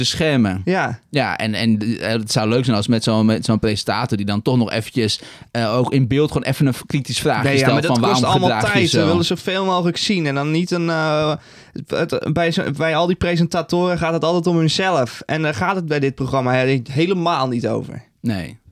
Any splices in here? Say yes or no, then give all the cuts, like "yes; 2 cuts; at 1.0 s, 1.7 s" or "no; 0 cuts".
no; 0 cuts